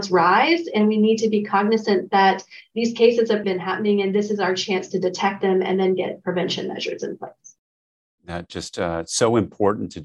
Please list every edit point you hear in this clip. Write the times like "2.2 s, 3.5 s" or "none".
3.4 s